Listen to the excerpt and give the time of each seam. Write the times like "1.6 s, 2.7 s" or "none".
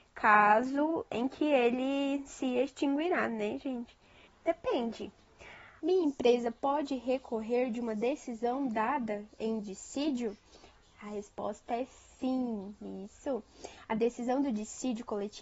4.3 s, 5.8 s